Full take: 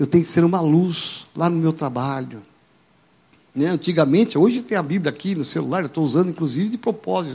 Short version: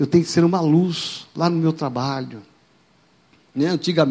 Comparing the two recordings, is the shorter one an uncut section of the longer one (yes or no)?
yes